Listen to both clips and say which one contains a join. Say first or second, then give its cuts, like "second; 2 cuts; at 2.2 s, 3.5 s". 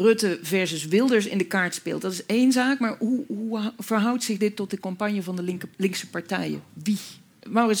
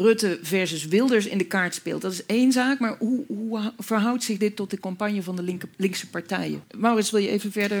second; 1 cut; at 6.6 s